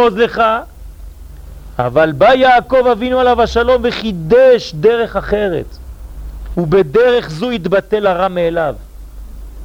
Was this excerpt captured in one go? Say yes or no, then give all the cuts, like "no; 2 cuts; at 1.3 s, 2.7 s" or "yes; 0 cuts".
no; 1 cut; at 6.5 s